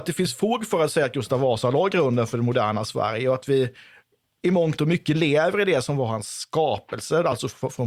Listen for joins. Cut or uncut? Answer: uncut